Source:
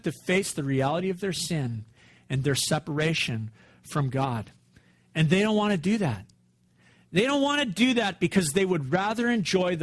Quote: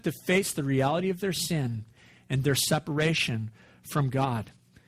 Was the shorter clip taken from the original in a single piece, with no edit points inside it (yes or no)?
yes